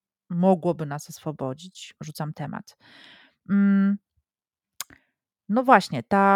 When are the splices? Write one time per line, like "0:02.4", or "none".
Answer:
0:02.0